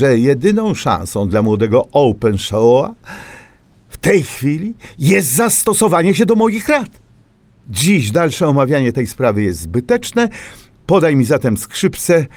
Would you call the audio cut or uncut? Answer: uncut